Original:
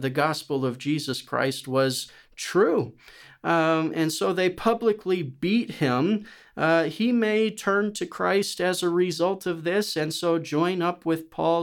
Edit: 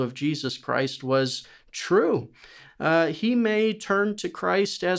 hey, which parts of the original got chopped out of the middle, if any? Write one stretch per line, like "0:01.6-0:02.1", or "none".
0:03.3-0:06.4